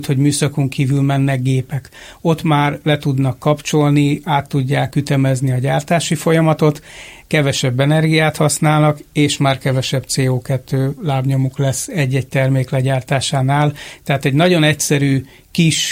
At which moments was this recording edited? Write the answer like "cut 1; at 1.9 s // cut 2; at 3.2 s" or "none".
none